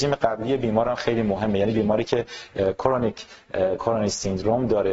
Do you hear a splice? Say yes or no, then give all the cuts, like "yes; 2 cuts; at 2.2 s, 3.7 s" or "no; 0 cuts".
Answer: no; 0 cuts